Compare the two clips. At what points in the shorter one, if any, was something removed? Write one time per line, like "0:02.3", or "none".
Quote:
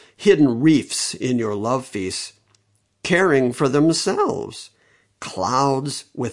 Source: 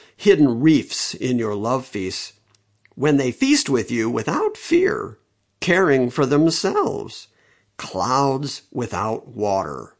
0:02.8